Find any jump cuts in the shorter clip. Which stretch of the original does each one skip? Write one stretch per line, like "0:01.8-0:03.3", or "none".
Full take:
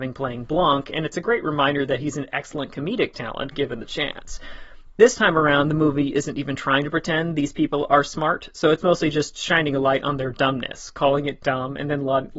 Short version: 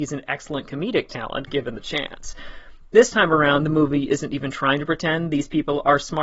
none